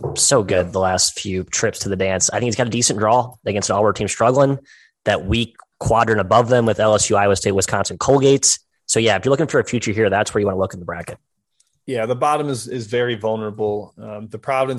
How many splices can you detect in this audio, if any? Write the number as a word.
zero